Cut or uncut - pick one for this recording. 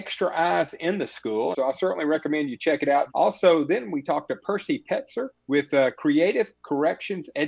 cut